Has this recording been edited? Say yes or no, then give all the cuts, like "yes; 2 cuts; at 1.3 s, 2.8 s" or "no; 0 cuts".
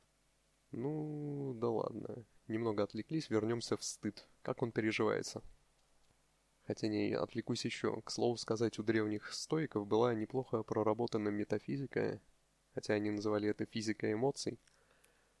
no; 0 cuts